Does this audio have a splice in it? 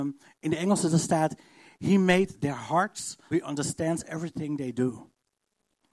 yes; 1 cut; at 3.3 s

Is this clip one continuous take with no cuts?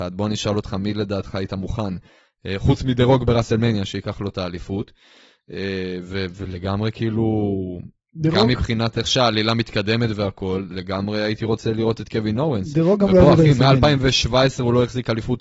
yes; 0 cuts

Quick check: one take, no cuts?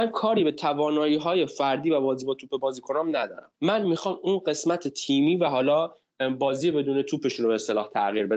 no; 1 cut; at 3.5 s

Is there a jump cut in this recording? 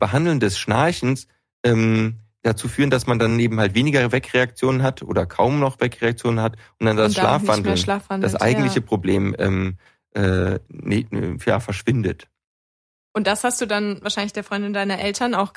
no; 0 cuts

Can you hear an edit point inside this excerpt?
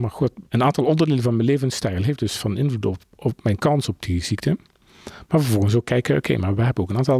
no; 0 cuts

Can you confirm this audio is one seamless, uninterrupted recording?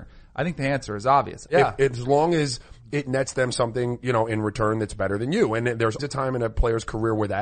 no; 2 cuts; at 1.5 s, 6.0 s

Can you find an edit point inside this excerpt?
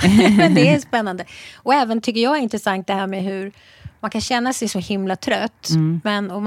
no; 0 cuts

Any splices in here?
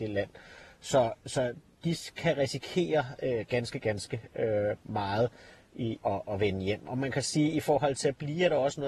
yes; 1 cut; at 6.0 s

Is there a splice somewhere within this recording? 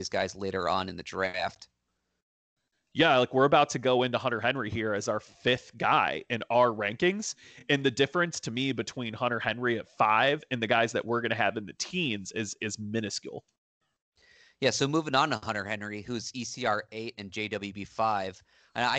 no; 0 cuts

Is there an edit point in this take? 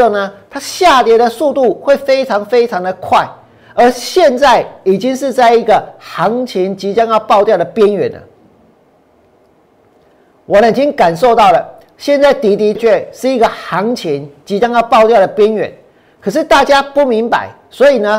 yes; 1 cut; at 12.8 s

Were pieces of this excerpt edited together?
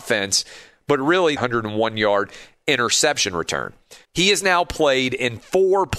yes; 2 cuts; at 1.4 s, 4.0 s

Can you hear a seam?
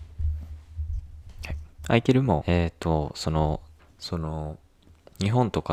yes; 2 cuts; at 2.4 s, 3.8 s

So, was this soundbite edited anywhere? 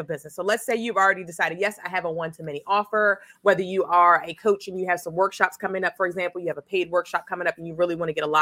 yes; 1 cut; at 3.3 s

